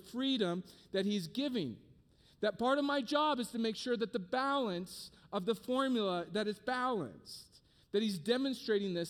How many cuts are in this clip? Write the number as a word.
zero